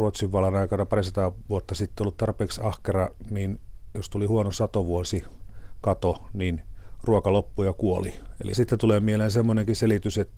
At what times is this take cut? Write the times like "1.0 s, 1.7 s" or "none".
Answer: 8.5 s